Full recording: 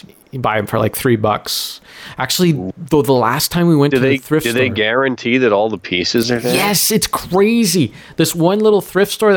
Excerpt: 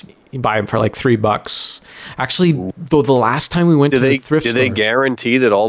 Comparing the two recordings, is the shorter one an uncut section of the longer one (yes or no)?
yes